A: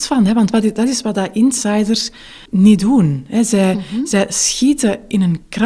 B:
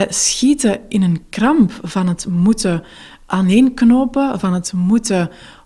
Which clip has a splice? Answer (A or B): A